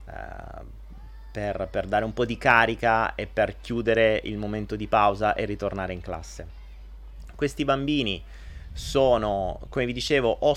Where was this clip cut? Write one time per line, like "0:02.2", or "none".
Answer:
none